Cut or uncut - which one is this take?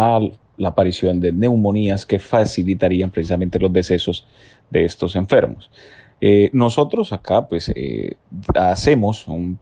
uncut